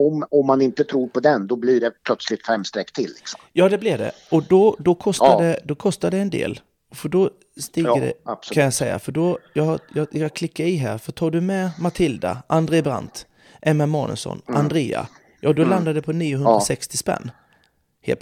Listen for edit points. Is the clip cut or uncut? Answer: uncut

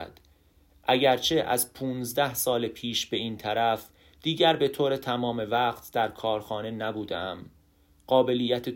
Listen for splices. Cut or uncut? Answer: uncut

